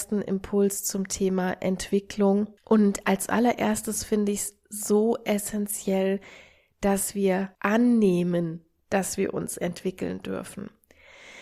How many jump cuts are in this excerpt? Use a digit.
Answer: 2